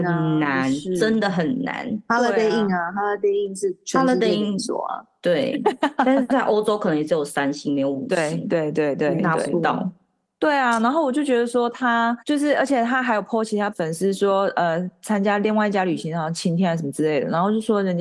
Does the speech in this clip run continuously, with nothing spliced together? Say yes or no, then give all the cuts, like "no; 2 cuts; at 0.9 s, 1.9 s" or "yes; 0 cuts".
no; 2 cuts; at 12.2 s, 13.7 s